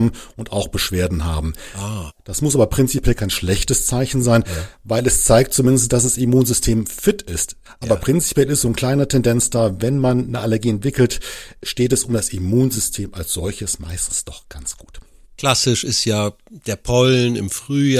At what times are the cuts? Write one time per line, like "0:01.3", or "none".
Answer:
0:07.7